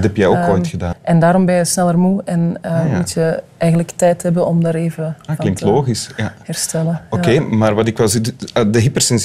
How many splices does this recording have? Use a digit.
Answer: 1